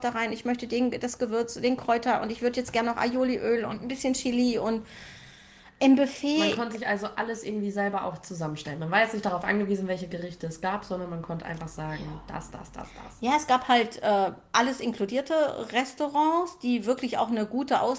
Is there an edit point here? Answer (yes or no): no